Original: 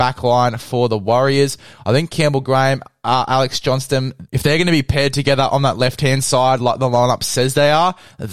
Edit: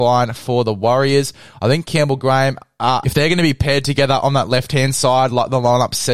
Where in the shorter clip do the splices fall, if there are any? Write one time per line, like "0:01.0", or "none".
0:03.0